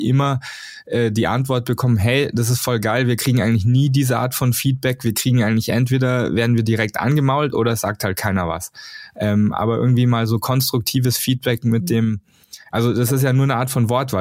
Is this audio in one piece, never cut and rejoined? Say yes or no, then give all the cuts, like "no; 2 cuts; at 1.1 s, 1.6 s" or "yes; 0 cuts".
yes; 0 cuts